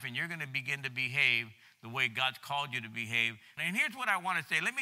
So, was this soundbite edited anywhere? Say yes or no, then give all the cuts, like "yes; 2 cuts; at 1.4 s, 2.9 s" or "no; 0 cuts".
yes; 1 cut; at 3.6 s